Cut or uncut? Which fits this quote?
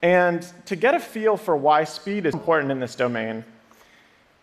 cut